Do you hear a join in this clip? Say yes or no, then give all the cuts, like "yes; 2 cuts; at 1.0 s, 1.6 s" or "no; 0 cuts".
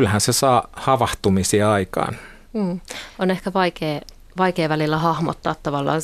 yes; 1 cut; at 2.4 s